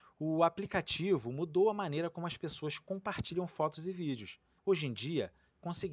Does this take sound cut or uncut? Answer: cut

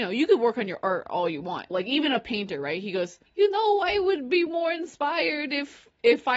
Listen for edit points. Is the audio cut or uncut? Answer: cut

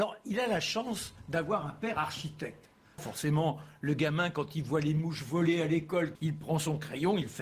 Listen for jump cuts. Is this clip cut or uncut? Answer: cut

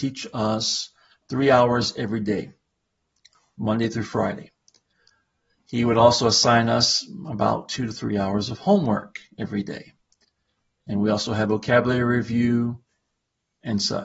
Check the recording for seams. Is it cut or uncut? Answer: uncut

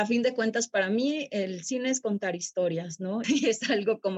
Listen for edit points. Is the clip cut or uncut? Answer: cut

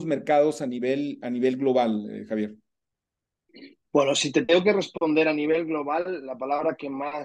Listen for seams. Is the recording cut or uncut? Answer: uncut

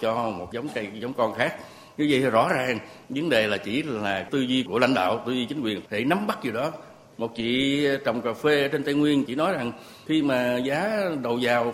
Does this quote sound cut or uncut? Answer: uncut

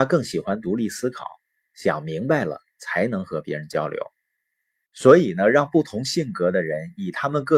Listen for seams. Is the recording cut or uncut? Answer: uncut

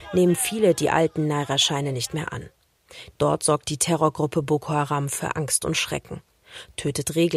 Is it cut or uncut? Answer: cut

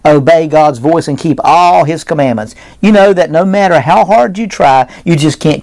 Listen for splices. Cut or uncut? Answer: uncut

